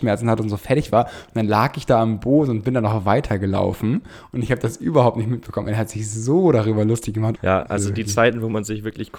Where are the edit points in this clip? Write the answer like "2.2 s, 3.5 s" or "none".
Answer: 7.4 s

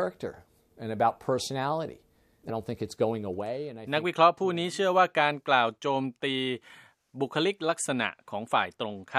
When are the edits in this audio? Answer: 2.5 s

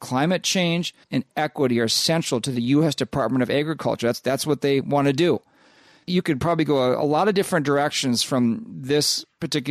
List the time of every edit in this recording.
1.0 s

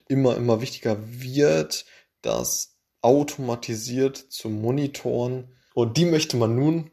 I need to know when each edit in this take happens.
5.7 s

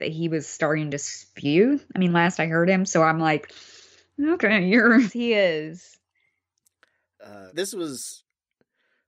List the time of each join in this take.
5.1 s, 7.5 s

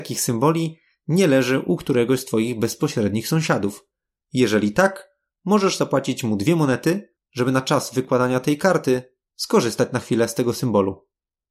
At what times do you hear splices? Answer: none

